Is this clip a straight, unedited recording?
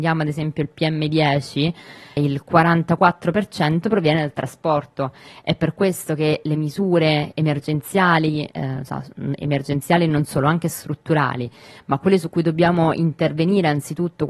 no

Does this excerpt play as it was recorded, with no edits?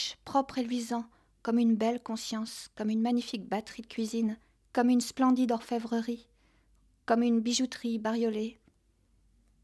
yes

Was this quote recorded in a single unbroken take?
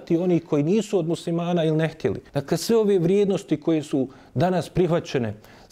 no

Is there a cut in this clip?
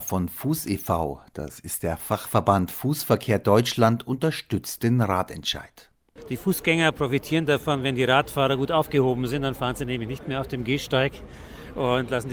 no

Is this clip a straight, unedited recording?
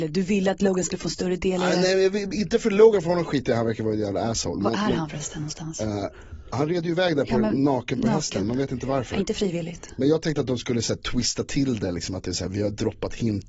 yes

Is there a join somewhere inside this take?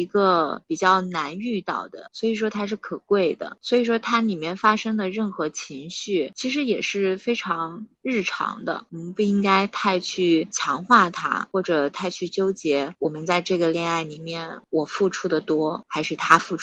no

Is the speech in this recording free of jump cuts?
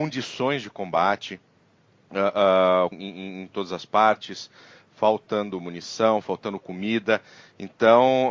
no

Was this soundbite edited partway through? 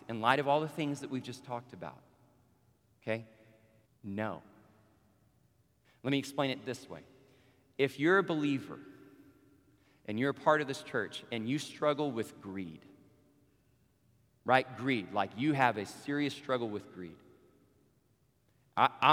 yes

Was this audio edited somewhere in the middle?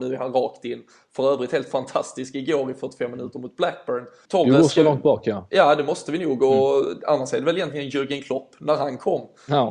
yes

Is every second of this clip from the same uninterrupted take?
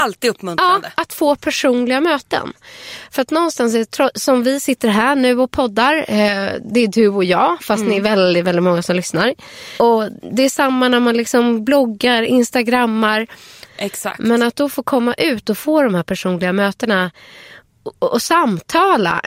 no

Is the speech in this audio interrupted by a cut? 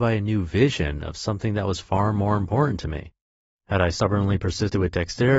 no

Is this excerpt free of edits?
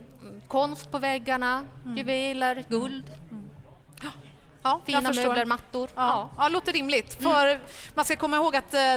yes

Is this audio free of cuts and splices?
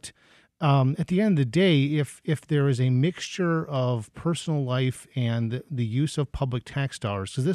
yes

